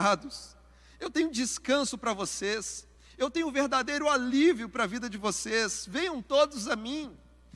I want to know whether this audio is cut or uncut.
uncut